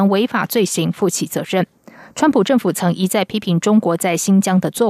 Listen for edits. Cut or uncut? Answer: uncut